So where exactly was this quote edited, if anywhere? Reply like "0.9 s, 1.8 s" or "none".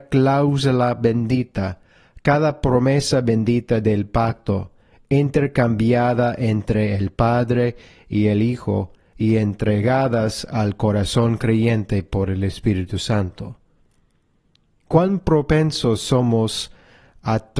none